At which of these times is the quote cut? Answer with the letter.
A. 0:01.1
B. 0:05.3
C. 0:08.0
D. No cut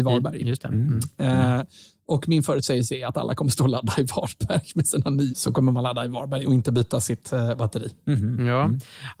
B